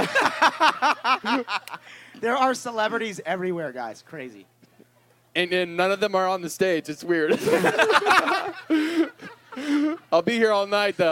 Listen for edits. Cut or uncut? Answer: uncut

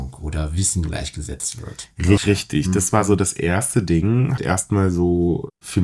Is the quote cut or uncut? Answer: cut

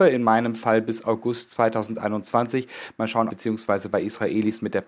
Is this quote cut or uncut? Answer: cut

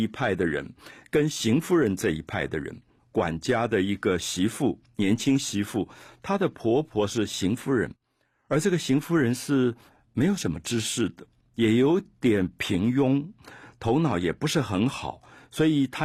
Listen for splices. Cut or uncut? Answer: cut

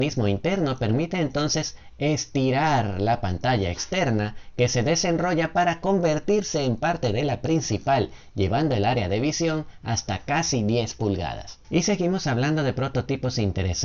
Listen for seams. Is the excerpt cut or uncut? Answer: cut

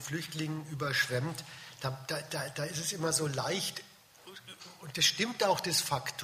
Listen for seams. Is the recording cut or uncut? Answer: uncut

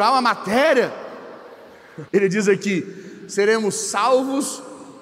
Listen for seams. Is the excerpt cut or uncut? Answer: cut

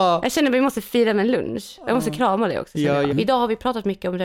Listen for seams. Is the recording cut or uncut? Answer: cut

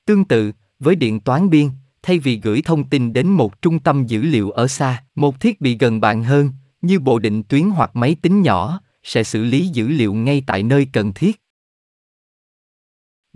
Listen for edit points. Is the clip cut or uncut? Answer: cut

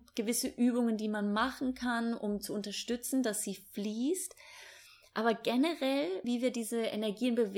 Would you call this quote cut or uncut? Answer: cut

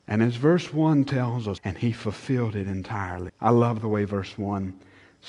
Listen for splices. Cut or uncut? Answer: cut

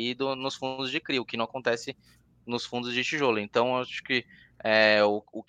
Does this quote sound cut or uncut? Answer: uncut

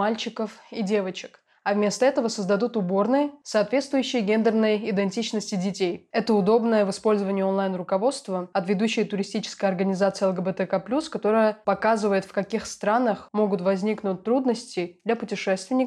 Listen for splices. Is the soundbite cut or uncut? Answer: cut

